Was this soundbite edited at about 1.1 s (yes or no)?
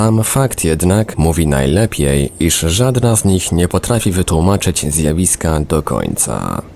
yes